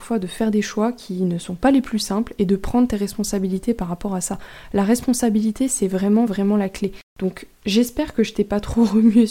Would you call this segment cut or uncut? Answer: uncut